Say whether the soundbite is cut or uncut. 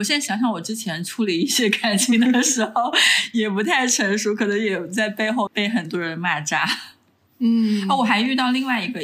cut